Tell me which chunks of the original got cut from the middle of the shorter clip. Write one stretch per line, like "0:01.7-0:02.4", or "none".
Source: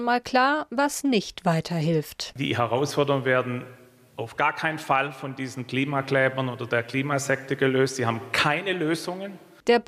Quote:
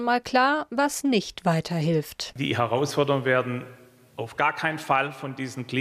none